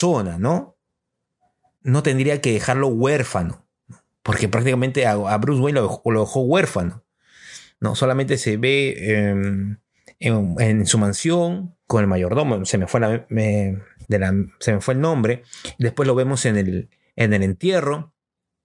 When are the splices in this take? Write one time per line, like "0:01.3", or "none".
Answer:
0:11.9
0:14.0

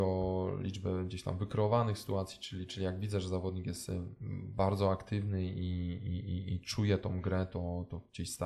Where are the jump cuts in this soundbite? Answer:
none

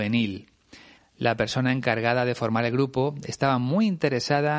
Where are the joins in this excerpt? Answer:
0:01.0

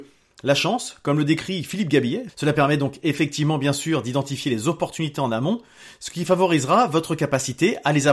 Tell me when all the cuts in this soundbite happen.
0:02.3

